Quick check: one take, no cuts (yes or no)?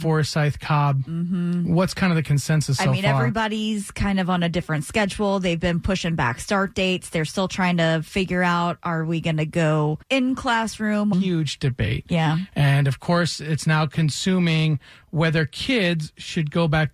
no